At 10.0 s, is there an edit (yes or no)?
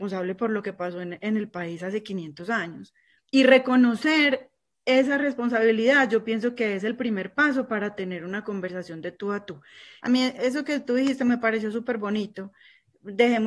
yes